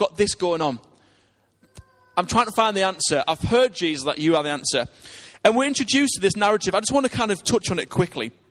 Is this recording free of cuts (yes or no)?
yes